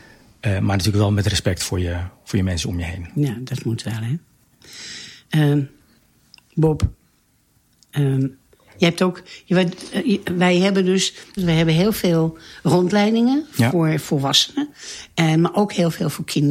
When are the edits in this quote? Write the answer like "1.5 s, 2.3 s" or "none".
11.4 s